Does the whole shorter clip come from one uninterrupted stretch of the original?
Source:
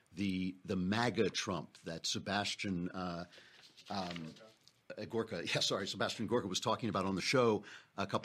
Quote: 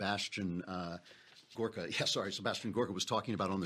no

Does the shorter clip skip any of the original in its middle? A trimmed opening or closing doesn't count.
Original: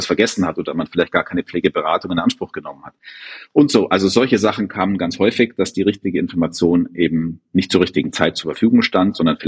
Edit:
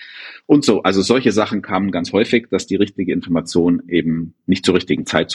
no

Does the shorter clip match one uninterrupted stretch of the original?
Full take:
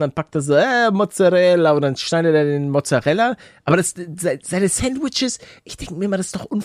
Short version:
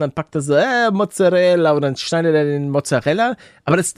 yes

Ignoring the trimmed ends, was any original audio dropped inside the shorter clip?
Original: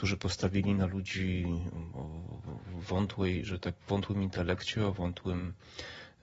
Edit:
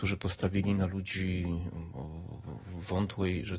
no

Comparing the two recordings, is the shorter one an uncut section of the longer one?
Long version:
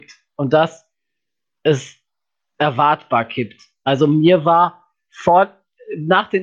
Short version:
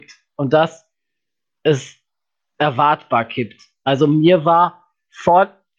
yes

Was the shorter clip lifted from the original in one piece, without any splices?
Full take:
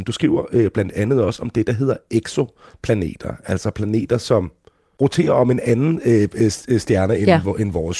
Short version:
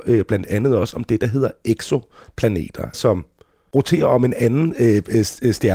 no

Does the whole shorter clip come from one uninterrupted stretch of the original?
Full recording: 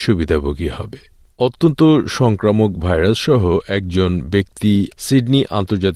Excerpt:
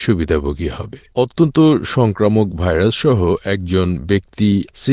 no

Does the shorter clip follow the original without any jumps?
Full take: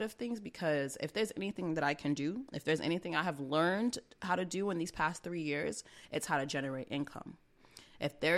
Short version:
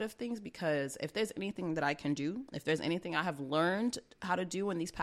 yes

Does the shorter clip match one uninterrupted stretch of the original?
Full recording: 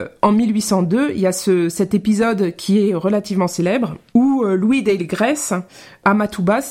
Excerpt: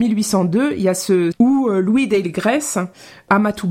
no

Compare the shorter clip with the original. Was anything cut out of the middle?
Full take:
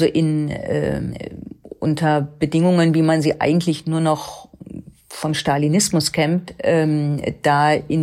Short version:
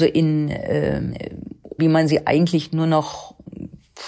yes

